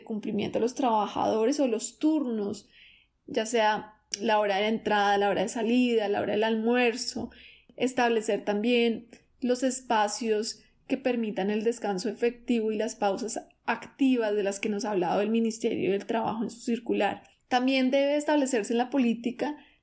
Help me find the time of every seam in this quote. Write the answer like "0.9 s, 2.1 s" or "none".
none